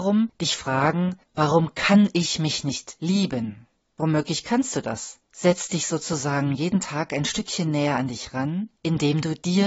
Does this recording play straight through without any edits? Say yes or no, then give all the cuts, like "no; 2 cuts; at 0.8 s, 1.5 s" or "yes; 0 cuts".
no; 2 cuts; at 1.2 s, 5.2 s